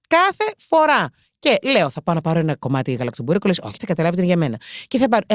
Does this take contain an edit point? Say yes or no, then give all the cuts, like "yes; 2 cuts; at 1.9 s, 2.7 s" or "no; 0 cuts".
yes; 1 cut; at 3.8 s